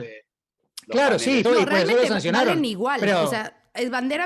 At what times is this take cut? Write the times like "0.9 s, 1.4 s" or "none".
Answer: 1.4 s